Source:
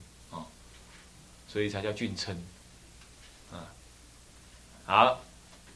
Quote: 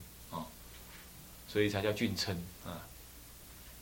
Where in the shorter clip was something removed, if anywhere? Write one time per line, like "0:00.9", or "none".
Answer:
0:02.5